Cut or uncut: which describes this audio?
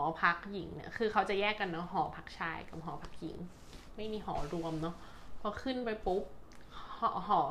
uncut